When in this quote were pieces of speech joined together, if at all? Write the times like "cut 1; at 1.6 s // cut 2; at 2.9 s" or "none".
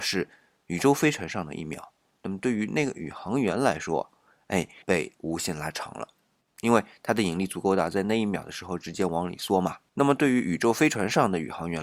cut 1; at 4.8 s // cut 2; at 6.5 s // cut 3; at 9.9 s